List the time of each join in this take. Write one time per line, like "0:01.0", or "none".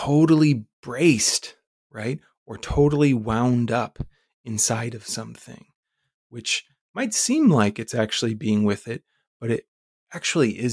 none